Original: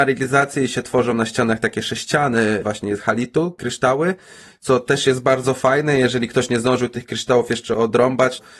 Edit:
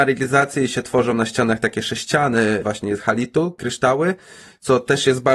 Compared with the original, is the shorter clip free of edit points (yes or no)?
yes